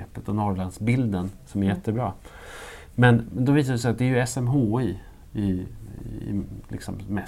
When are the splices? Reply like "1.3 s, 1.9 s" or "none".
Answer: none